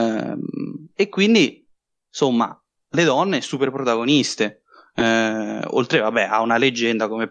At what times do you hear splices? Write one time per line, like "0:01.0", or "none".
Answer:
none